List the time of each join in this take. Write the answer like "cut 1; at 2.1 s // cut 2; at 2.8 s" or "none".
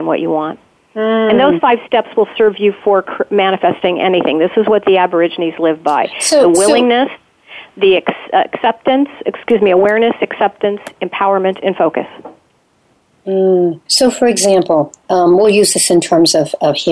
cut 1; at 13.9 s